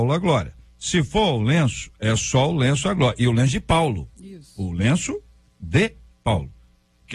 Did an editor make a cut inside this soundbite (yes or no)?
no